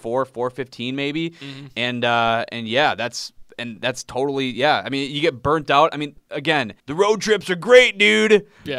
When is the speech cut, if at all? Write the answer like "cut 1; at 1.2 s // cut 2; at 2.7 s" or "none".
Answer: cut 1; at 6.8 s